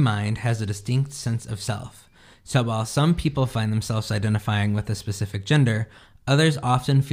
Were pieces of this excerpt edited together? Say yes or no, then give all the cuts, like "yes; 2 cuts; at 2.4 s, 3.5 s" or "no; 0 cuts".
no; 0 cuts